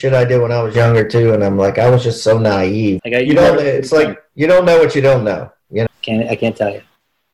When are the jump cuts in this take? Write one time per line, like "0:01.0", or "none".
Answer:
0:03.0
0:05.9